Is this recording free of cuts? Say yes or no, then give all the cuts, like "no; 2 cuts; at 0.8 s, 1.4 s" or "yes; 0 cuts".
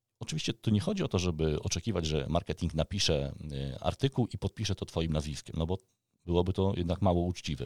yes; 0 cuts